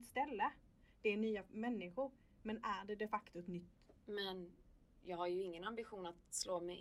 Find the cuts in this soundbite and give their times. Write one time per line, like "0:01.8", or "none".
0:04.0